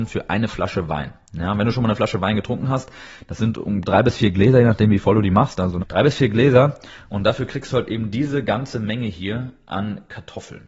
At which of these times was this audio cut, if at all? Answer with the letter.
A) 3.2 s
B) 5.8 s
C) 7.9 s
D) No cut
B